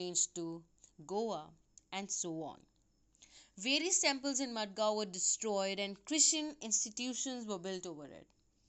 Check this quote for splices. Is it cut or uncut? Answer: cut